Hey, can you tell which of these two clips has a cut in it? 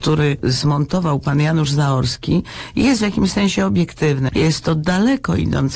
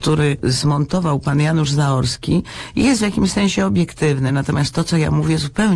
first; 1 cut; at 4.3 s

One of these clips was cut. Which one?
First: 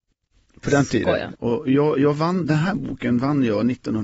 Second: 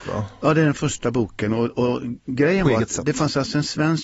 first; 2 cuts; at 1.3 s, 2.4 s

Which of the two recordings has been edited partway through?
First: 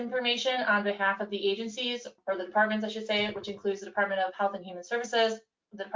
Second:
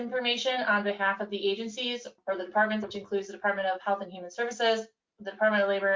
second; 1 cut; at 2.8 s

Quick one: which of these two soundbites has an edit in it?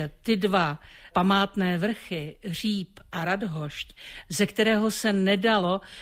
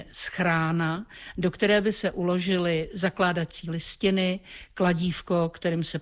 first; 1 cut; at 4.3 s

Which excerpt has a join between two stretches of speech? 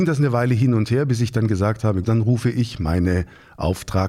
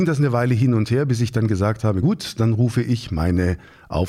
first; 1 cut; at 2.0 s

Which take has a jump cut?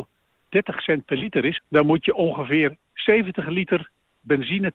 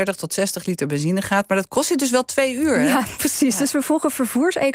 first; 1 cut; at 1.6 s

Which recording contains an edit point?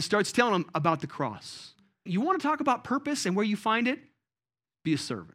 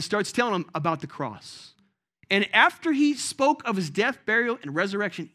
first; 1 cut; at 2.1 s

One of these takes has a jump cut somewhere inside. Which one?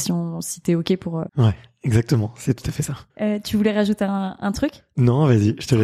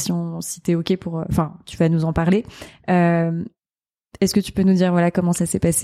first; 2 cuts; at 1.3 s, 3.1 s

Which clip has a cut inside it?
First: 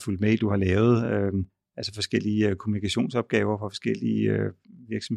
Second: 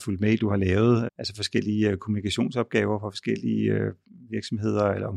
second; 1 cut; at 1.1 s

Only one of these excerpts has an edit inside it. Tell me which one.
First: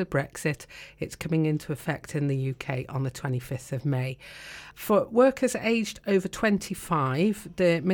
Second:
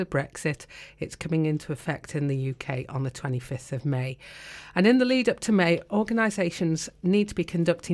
first; 1 cut; at 4.7 s

